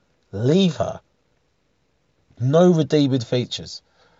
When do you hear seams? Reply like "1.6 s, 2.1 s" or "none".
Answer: none